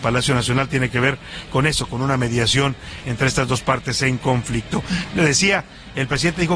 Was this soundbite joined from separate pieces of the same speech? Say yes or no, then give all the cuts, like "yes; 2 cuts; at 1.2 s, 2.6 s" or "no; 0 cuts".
no; 0 cuts